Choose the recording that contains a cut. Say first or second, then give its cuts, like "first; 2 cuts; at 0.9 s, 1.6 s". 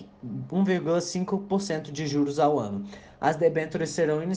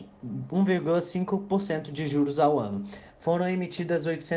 second; 1 cut; at 3.1 s